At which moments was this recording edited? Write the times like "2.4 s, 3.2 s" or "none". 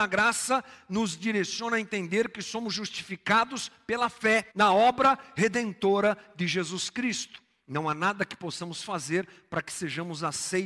4.5 s